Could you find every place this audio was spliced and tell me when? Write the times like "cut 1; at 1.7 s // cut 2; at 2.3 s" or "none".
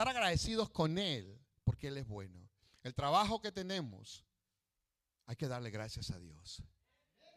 none